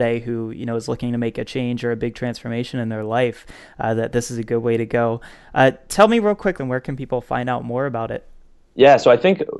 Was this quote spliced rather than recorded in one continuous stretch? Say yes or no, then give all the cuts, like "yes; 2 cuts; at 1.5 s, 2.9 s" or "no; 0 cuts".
yes; 1 cut; at 6.6 s